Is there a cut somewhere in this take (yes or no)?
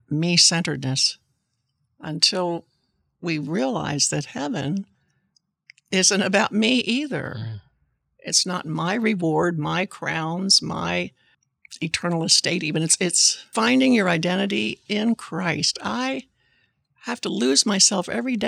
yes